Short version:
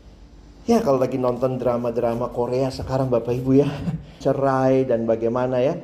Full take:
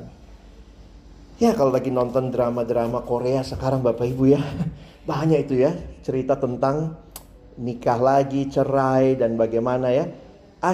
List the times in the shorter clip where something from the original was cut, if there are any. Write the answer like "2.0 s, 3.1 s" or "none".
4.2 s